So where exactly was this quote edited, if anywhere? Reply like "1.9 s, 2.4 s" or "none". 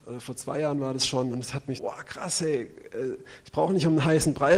1.8 s